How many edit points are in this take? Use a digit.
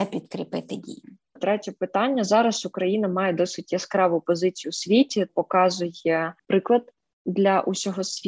2